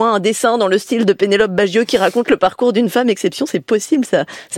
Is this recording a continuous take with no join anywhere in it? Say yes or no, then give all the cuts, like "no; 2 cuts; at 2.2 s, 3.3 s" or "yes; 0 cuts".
yes; 0 cuts